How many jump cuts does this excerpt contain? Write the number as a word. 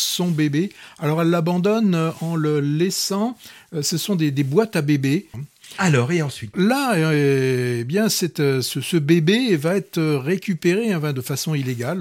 two